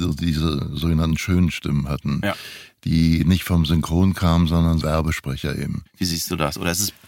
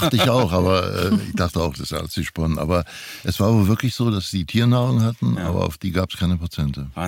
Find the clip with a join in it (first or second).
first